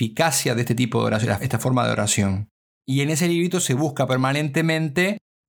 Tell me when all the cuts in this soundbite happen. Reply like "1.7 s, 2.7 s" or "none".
1.4 s, 2.8 s